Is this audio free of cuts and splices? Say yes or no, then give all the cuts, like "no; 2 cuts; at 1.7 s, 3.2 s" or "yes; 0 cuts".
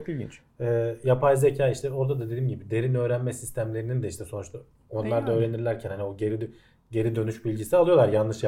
yes; 0 cuts